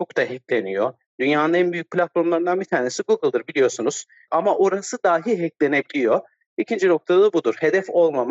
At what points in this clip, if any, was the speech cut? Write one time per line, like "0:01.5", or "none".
0:04.3